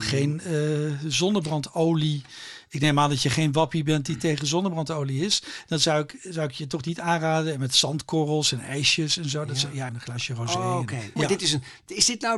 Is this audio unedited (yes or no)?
no